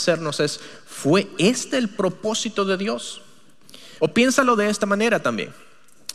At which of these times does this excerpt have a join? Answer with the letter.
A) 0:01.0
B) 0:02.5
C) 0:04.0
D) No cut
C